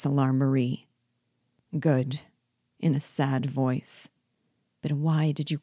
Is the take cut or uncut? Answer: cut